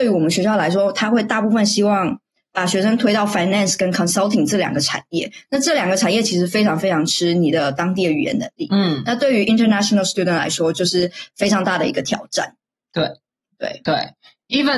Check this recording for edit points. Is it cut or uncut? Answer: uncut